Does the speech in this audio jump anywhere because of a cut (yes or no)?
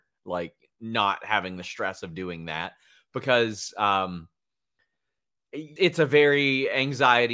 yes